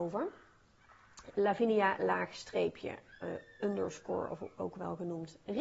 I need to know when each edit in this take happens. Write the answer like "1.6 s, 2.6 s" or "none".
1.3 s